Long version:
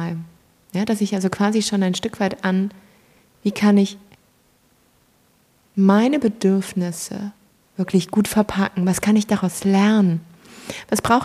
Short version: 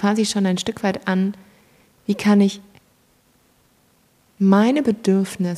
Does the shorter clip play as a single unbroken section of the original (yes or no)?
yes